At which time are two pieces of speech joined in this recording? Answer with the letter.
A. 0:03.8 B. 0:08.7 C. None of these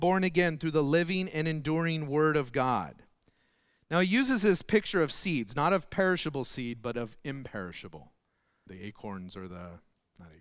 B